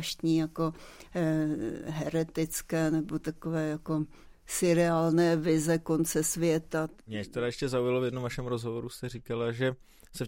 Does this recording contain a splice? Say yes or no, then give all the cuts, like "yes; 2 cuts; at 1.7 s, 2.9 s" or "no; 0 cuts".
no; 0 cuts